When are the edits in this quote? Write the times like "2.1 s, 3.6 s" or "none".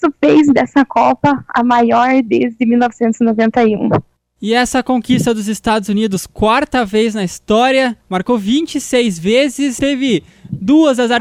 8.0 s, 9.8 s